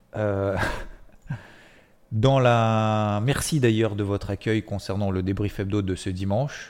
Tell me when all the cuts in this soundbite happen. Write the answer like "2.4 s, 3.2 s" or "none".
none